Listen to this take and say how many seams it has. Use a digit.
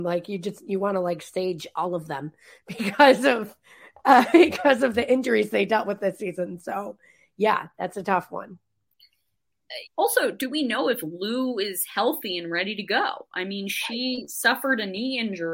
1